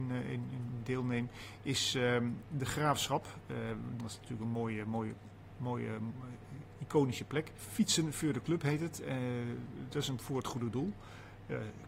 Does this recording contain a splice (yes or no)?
yes